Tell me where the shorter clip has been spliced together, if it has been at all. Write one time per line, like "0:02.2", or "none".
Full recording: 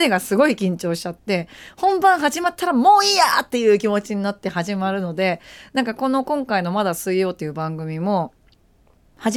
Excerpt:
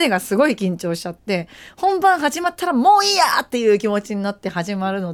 none

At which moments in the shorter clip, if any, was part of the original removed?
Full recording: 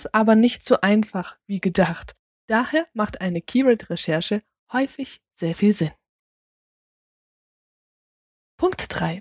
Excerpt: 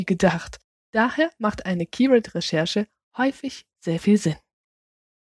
none

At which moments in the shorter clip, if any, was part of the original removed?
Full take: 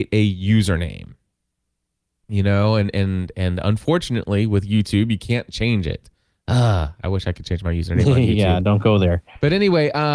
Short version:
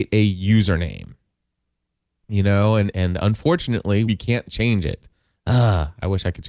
0:02.9
0:04.1

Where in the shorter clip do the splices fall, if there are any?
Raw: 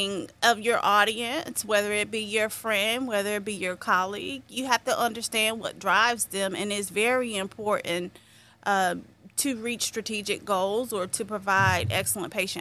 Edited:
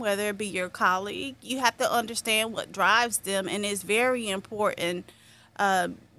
none

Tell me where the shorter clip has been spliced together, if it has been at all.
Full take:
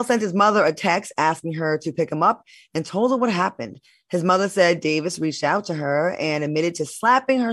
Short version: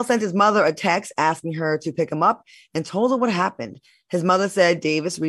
none

